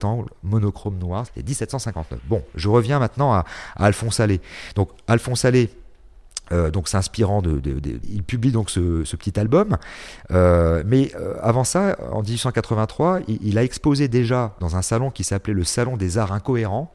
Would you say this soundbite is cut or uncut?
cut